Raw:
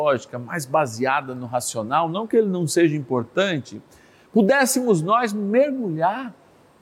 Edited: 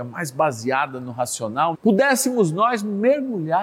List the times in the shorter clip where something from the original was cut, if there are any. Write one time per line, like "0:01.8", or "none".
0:01.7

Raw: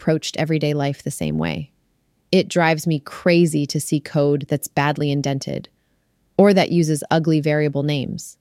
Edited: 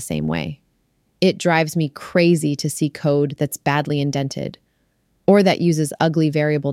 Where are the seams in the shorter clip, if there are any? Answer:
none

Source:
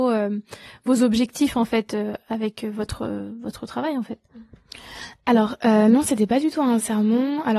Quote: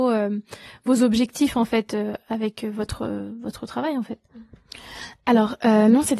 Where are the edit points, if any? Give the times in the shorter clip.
none

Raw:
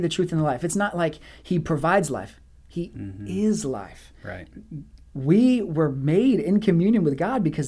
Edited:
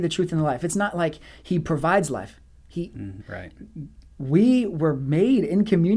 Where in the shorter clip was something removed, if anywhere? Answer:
0:03.2

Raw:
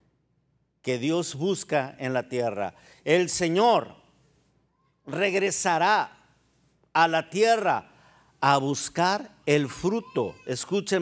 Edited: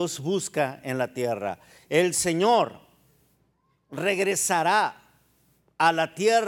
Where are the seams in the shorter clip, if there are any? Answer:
none

